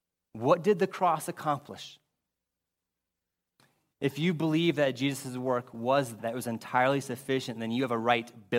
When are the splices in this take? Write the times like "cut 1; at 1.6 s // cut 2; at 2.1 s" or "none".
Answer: cut 1; at 3.9 s // cut 2; at 6.2 s